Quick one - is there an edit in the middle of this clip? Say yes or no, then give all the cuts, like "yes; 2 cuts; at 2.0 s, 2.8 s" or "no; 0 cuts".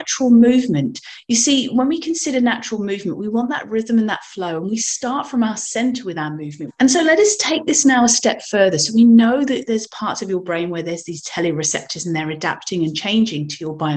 yes; 1 cut; at 6.7 s